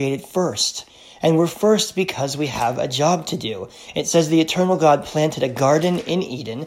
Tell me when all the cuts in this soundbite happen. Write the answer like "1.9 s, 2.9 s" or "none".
none